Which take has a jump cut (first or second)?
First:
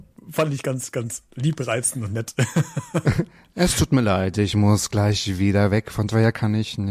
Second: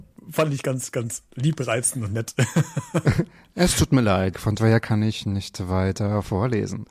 second